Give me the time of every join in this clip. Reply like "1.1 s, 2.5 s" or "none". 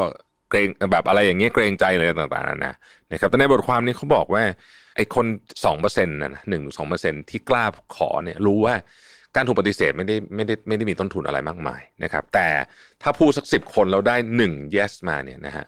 none